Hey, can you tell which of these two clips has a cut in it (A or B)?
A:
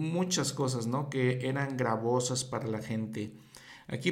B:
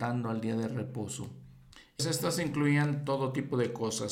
B